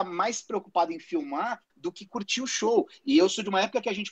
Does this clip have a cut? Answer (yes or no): yes